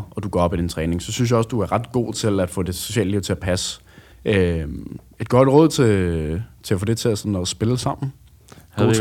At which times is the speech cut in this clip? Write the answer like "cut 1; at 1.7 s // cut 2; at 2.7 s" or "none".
cut 1; at 4.1 s